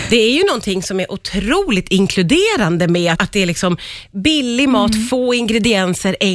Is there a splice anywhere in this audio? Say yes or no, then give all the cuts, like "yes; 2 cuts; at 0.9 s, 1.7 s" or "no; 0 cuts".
yes; 1 cut; at 3.1 s